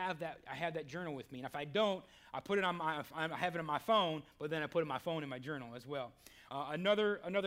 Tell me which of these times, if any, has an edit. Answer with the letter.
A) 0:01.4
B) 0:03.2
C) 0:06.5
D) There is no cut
C